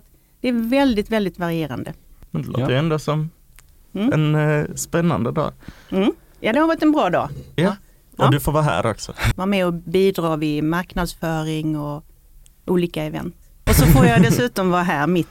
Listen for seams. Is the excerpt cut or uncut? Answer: cut